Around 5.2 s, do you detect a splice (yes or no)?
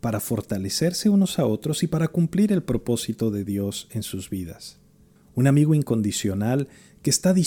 yes